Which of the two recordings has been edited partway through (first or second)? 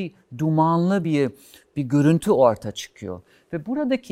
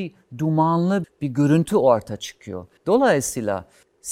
second